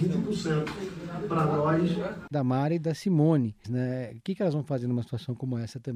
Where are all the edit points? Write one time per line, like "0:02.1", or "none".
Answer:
0:02.3
0:03.6